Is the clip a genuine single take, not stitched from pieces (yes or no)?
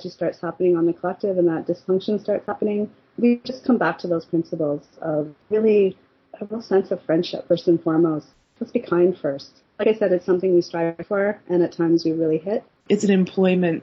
no